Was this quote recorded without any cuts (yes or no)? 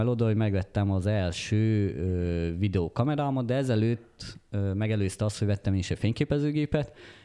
yes